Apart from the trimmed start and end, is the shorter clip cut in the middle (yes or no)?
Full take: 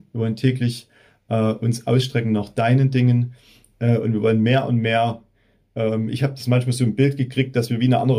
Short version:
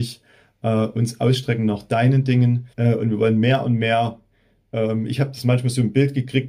yes